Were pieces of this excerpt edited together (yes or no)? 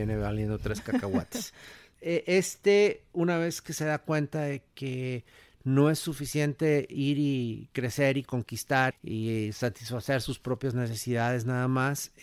yes